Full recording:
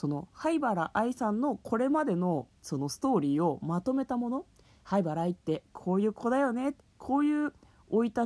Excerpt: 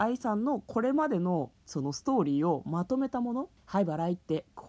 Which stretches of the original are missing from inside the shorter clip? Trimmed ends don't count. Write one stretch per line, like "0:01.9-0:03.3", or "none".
0:04.5-0:04.7